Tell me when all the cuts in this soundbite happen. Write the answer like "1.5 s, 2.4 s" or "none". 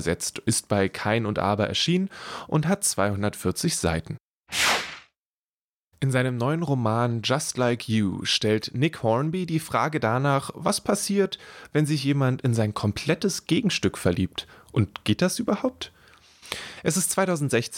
none